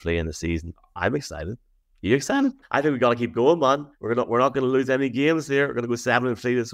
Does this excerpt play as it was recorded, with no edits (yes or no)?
no